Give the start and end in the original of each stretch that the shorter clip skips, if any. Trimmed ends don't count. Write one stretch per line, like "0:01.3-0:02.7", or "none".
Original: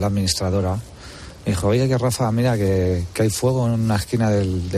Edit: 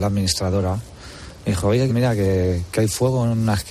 0:01.9-0:02.3